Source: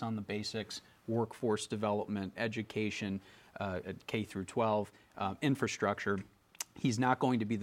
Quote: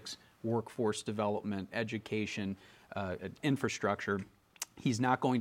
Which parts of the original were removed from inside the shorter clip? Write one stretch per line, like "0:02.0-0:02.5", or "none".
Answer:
0:04.0-0:05.4